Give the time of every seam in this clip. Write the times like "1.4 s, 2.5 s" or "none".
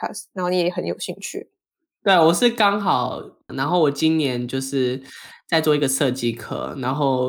3.5 s